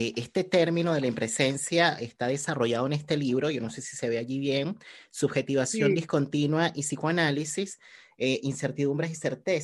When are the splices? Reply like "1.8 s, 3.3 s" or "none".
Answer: none